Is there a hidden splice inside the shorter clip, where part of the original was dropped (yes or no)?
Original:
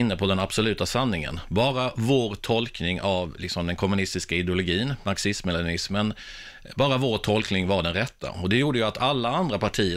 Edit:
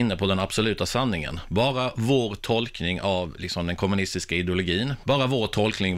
yes